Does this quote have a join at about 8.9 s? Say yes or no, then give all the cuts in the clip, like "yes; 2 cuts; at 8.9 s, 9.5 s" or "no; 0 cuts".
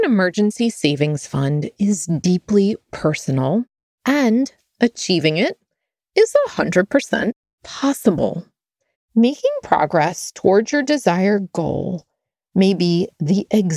yes; 1 cut; at 8.9 s